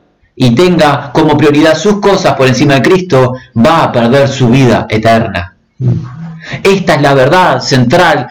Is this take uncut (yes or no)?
yes